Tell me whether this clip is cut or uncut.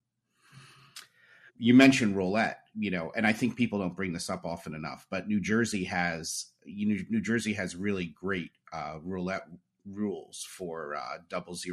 cut